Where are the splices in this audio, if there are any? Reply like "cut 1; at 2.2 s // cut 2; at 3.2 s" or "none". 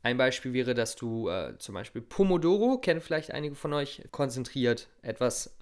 cut 1; at 4.1 s